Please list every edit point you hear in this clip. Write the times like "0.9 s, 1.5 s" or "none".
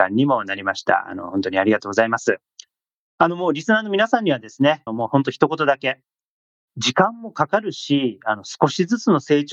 4.9 s